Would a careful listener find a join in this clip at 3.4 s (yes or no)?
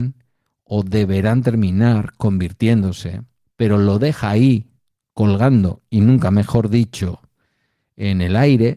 yes